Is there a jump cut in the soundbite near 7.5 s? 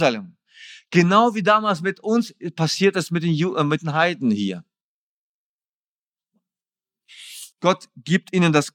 yes; 1 cut; at 7.5 s

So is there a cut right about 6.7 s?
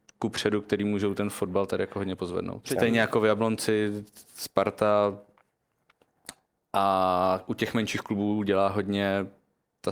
no; 1 cut; at 2.6 s

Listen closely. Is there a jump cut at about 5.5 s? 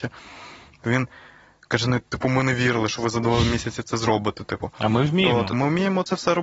yes; 1 cut; at 5.5 s

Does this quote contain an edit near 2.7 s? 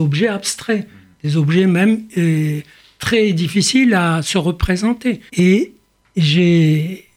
no; 1 cut; at 5.3 s

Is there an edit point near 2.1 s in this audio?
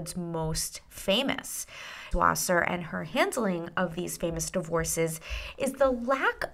yes; 1 cut; at 2.1 s

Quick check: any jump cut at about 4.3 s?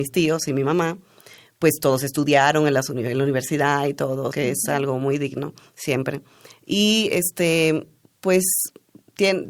yes; 1 cut; at 4.3 s

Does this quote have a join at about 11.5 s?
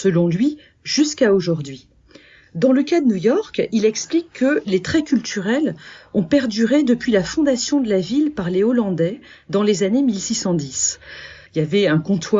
yes; 1 cut; at 11.5 s

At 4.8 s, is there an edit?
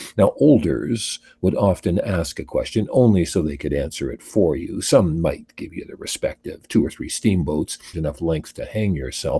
no; 1 cut; at 7.9 s

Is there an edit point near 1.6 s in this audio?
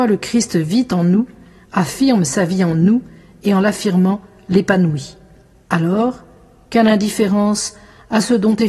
no; 1 cut; at 5.7 s

